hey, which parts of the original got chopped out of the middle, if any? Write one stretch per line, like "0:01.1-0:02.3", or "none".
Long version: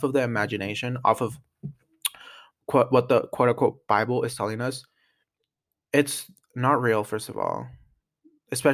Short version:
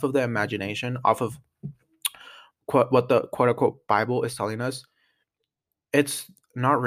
none